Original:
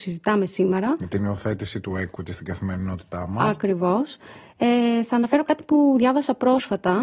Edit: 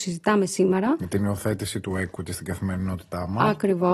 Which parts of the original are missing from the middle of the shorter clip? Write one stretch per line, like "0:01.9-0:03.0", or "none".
none

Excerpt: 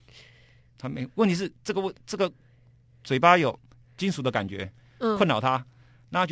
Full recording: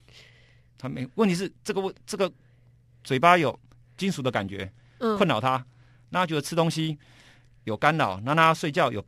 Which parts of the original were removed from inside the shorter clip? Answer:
none

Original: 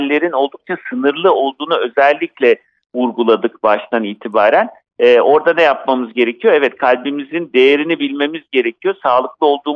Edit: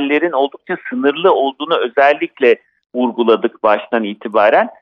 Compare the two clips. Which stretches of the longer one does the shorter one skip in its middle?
none

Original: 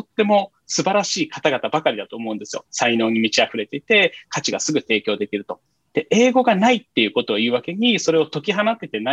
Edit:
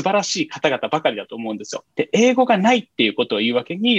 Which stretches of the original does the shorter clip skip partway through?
0:02.6-0:05.8

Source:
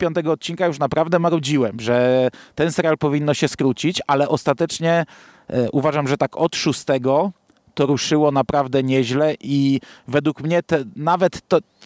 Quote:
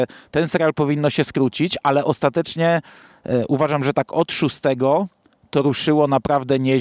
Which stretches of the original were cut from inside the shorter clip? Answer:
none

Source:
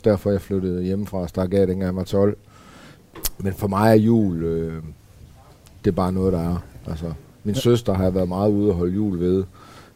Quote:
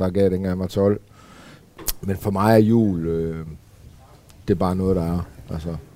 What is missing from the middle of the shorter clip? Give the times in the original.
none

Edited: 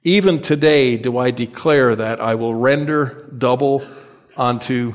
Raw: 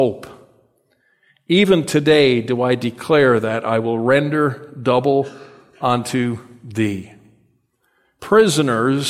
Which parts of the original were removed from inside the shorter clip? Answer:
none

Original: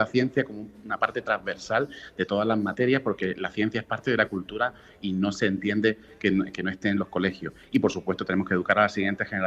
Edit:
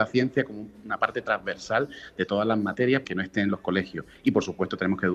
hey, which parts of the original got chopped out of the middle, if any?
0:03.0-0:06.5

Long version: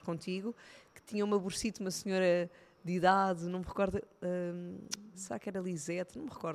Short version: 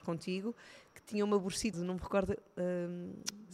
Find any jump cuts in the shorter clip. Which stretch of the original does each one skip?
0:01.7-0:03.4

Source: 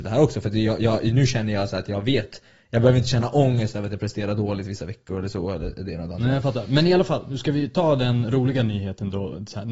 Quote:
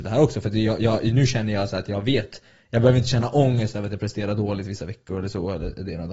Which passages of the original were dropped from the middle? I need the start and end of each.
none

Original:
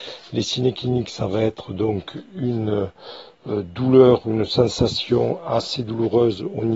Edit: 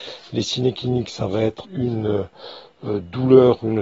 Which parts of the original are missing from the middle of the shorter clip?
0:01.6-0:02.3

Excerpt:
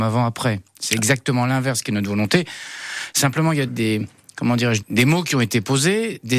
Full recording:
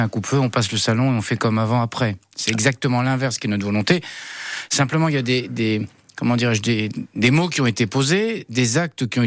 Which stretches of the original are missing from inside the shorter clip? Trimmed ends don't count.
0:05.2-0:05.5
0:06.6-0:07.1

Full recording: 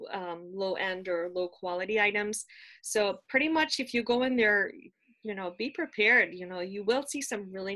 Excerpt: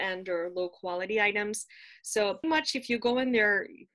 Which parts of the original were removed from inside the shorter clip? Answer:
0:03.2-0:03.5

